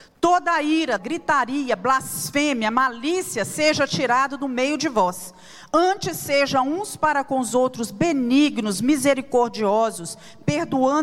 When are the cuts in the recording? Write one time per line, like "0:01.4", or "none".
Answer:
0:01.0